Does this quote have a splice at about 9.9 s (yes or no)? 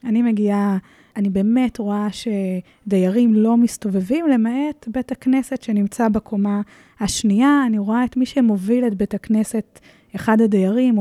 no